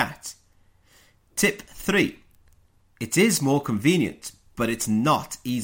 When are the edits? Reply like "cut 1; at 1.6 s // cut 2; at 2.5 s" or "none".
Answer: cut 1; at 1.1 s // cut 2; at 2.8 s